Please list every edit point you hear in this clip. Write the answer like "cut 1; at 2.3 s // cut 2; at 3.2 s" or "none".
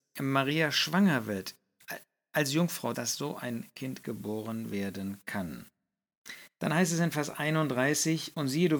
cut 1; at 2.9 s